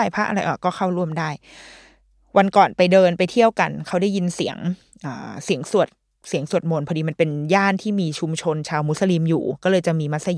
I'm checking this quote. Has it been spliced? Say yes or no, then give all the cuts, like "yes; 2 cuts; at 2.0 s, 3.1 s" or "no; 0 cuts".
no; 0 cuts